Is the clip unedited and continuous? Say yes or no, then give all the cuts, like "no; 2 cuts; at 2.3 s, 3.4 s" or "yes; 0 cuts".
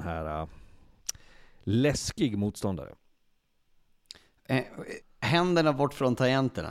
no; 1 cut; at 5.0 s